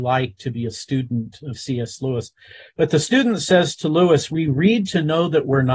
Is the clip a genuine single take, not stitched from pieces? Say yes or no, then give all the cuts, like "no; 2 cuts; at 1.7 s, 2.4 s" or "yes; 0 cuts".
yes; 0 cuts